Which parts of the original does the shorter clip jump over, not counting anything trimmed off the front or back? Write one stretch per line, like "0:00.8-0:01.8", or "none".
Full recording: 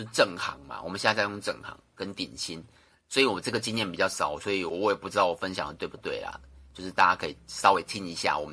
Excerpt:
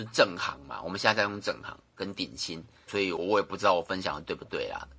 0:02.9-0:04.4